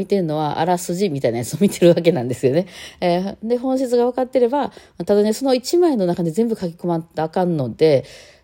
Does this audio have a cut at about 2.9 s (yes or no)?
no